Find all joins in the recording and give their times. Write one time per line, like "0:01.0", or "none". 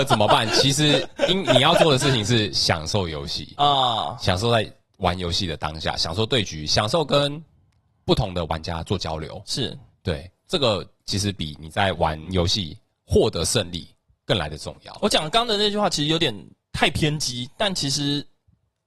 none